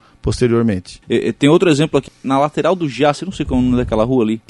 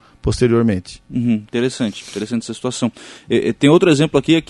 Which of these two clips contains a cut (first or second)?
first